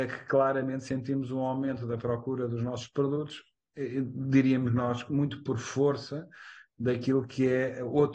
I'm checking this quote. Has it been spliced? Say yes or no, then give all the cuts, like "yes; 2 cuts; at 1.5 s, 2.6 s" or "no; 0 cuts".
no; 0 cuts